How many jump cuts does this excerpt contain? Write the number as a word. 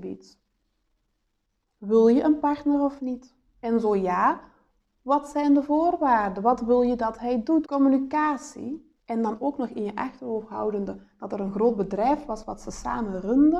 two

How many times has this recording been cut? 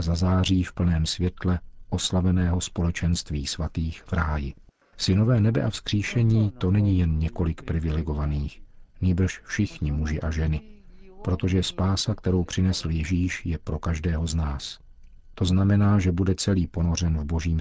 two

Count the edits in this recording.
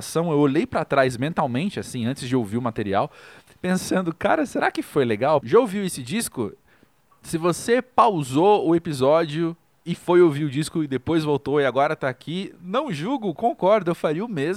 one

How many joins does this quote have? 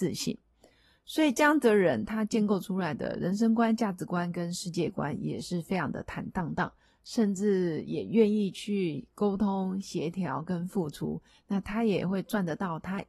zero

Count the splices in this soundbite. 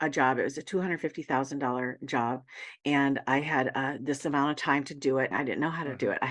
one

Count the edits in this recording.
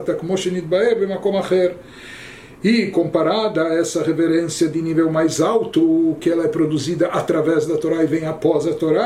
one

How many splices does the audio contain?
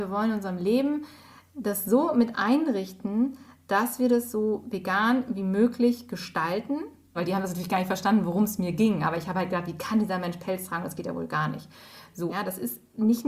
two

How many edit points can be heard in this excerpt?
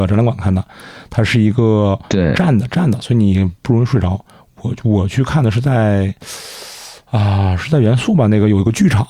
zero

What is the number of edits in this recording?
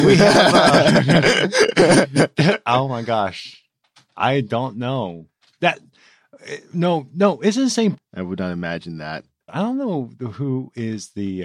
two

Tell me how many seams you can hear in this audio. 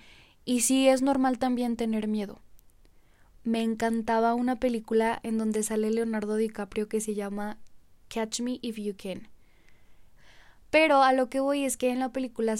two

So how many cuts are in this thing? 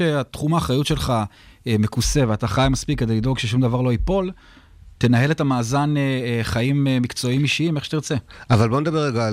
zero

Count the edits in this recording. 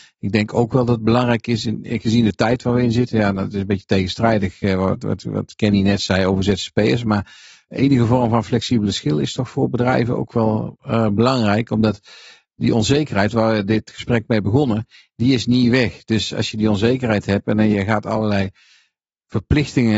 zero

